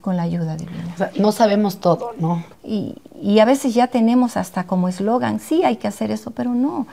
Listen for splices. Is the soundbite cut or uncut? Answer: cut